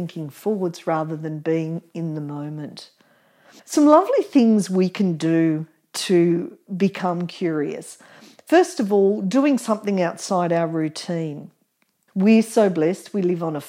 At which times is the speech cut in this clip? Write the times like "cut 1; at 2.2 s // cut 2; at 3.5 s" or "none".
cut 1; at 3.6 s // cut 2; at 12.1 s

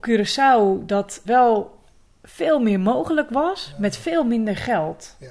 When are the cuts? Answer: cut 1; at 1.2 s

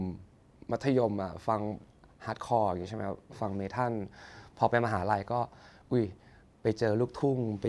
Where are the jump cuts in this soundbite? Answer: none

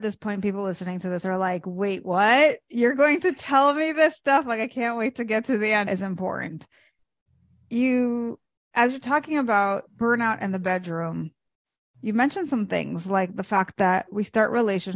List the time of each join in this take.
cut 1; at 5.9 s // cut 2; at 9.9 s

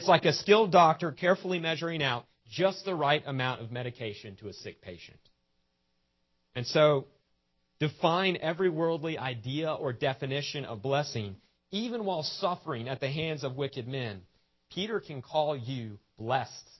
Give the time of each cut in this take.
none

